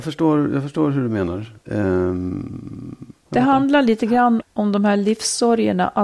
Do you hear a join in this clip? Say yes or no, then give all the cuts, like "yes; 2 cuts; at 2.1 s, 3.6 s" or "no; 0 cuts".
yes; 2 cuts; at 3.3 s, 4.4 s